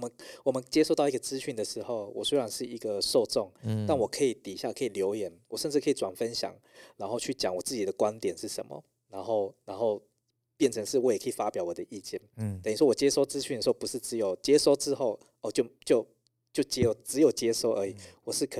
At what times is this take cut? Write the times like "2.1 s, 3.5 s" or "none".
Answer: none